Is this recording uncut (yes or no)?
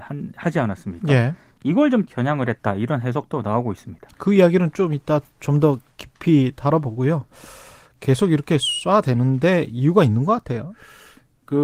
yes